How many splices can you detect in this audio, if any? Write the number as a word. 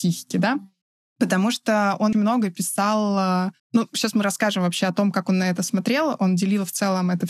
two